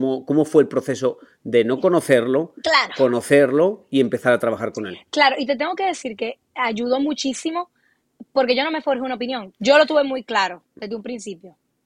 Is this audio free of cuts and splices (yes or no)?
no